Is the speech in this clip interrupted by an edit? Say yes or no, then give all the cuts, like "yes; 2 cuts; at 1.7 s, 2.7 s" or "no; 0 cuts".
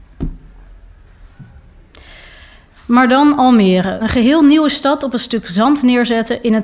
yes; 1 cut; at 4.0 s